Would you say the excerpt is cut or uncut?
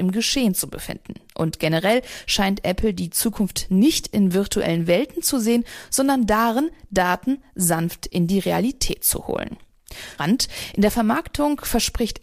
cut